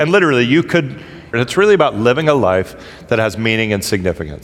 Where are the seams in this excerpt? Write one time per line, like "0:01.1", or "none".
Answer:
0:01.3

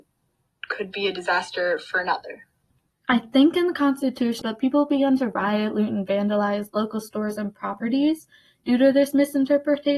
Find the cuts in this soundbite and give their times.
0:02.9
0:04.4

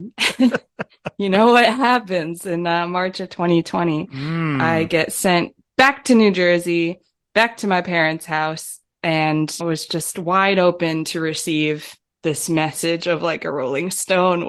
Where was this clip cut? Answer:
0:09.6

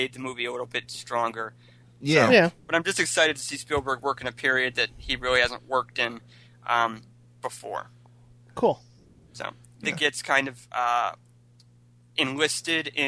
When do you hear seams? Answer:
0:01.8
0:09.8

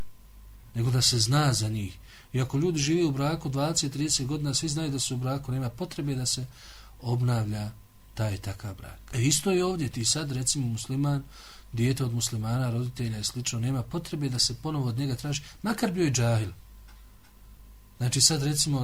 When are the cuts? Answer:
0:09.1

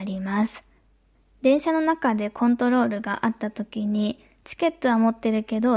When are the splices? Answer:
none

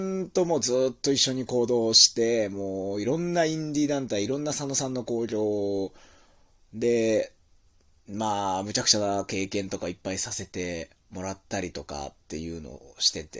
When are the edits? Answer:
none

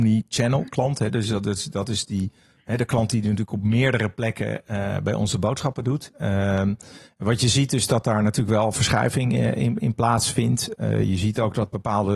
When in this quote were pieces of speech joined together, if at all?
0:06.1

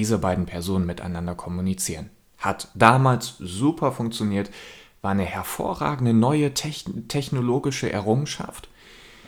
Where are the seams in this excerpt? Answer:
none

